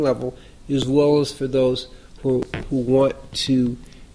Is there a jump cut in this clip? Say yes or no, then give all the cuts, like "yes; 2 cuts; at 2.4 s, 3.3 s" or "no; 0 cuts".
no; 0 cuts